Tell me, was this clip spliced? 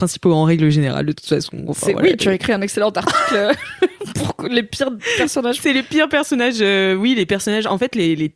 no; 0 cuts

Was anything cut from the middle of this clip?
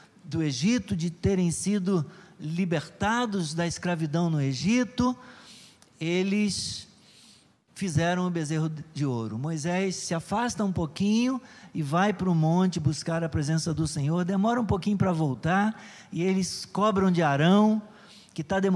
no; 0 cuts

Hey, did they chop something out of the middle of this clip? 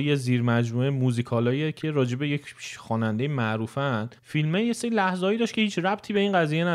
yes; 1 cut; at 4.2 s

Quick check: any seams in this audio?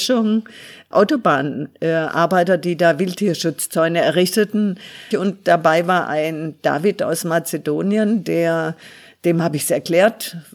yes; 1 cut; at 5.1 s

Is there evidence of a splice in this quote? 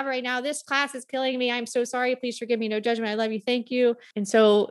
no; 0 cuts

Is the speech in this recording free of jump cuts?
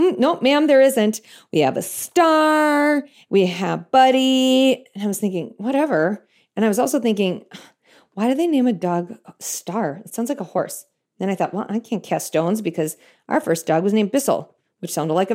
yes; 0 cuts

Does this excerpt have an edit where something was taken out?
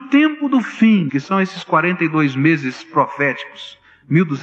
yes; 1 cut; at 1.1 s

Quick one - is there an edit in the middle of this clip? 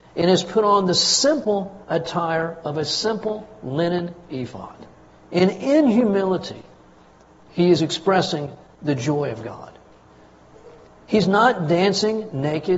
yes; 2 cuts; at 5.2 s, 11.0 s

